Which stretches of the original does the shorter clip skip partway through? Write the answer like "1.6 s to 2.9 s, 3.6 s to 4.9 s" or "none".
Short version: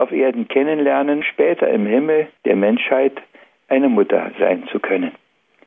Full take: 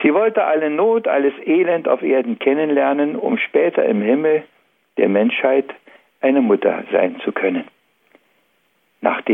3.1 s to 3.4 s, 4.5 s to 4.9 s